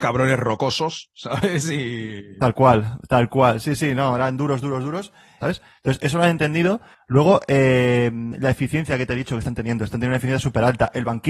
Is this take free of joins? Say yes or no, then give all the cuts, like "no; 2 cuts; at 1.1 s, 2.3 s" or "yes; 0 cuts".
no; 1 cut; at 5.4 s